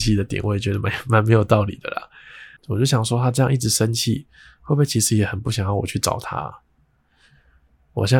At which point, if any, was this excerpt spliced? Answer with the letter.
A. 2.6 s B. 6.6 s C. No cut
A